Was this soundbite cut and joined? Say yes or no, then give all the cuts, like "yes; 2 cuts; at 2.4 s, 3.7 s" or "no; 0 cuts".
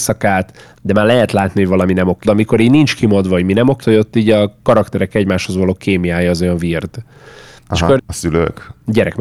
yes; 3 cuts; at 2.2 s, 3.8 s, 8.0 s